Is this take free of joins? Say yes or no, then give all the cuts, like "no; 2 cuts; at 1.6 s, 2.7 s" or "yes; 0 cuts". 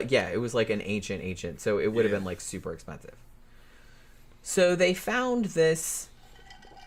yes; 0 cuts